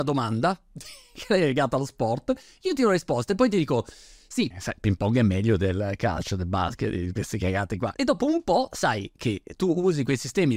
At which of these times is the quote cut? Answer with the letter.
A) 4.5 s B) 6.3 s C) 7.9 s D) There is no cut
A